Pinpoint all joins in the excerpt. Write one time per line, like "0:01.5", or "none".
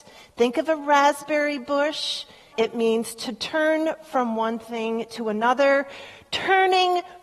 0:02.5